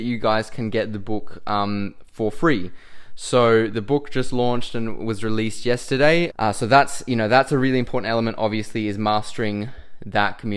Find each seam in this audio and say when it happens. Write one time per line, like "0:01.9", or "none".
0:06.3